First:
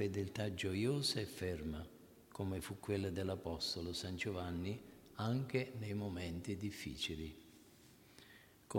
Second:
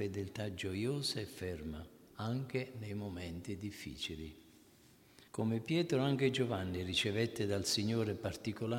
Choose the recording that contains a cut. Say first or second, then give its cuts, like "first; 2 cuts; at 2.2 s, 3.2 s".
second; 2 cuts; at 2.1 s, 5.3 s